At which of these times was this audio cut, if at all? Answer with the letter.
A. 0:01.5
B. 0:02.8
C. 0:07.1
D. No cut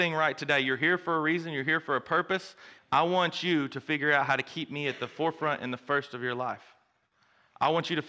B